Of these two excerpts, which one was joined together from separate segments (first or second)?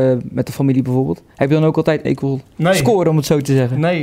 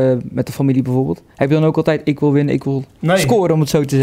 first